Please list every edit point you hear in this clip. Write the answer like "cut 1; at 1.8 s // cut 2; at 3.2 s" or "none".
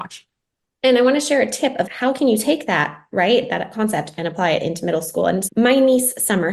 cut 1; at 1.9 s // cut 2; at 5.5 s